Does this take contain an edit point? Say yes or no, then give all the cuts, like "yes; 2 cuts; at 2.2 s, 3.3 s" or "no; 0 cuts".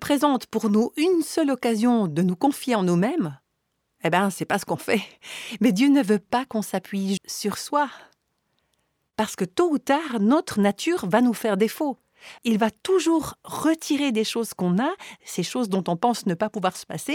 yes; 2 cuts; at 7.2 s, 12.4 s